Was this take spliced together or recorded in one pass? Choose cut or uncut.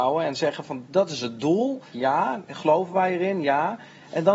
cut